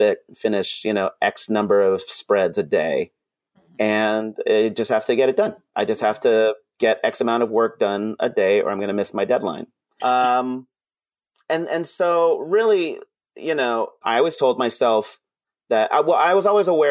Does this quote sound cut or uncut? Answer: cut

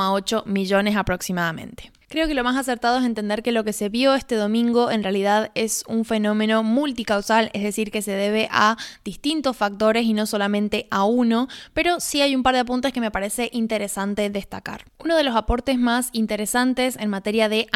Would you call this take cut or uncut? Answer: cut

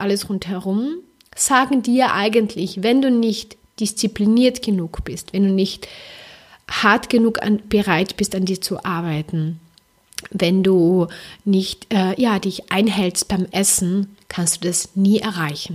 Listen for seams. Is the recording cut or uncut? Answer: uncut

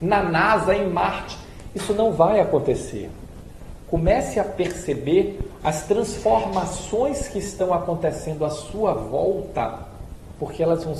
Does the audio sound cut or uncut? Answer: uncut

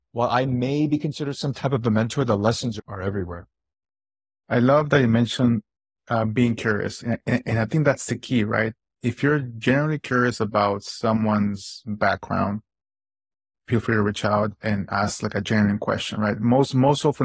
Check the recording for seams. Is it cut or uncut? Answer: uncut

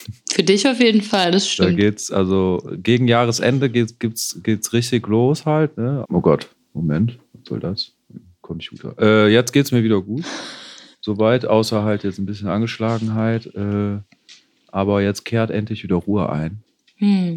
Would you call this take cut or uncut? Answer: cut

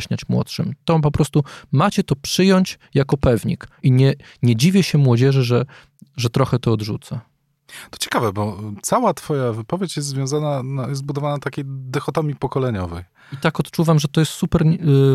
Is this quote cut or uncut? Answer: uncut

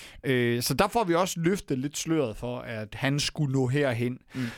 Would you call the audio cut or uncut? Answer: cut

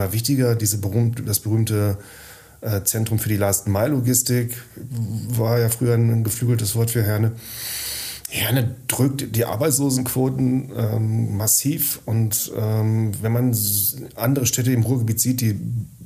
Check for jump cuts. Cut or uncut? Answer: uncut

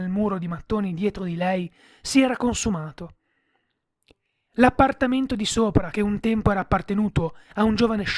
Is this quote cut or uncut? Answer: uncut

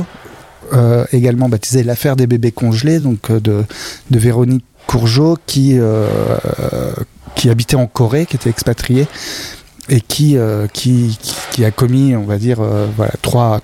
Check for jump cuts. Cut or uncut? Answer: uncut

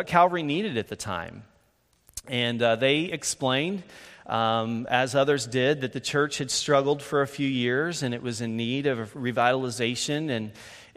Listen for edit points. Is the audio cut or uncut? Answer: uncut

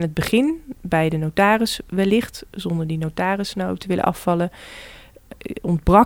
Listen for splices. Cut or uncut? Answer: uncut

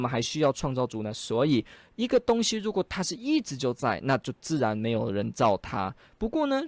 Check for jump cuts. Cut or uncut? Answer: uncut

